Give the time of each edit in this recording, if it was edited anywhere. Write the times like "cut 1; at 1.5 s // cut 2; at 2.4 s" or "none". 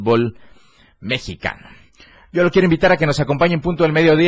none